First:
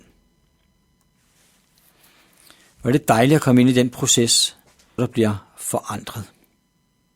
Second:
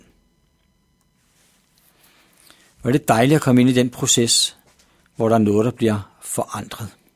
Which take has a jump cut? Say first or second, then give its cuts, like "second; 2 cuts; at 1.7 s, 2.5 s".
first; 1 cut; at 5.0 s